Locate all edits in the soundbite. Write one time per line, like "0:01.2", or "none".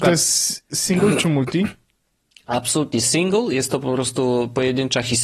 none